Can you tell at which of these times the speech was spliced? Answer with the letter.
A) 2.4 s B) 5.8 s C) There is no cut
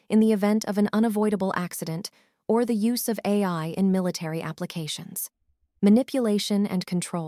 B